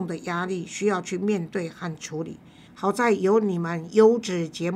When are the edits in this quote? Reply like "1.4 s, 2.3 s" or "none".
2.7 s